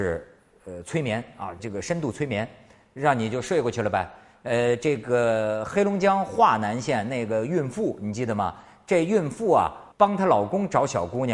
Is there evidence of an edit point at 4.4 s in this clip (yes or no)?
no